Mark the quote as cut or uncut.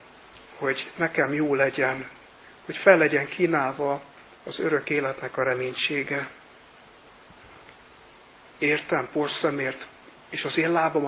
cut